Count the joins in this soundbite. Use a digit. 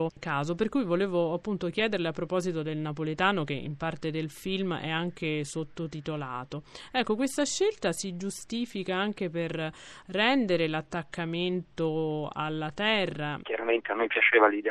1